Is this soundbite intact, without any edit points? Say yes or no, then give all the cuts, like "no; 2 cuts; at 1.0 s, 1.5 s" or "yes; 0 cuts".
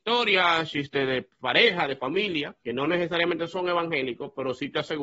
no; 1 cut; at 2.6 s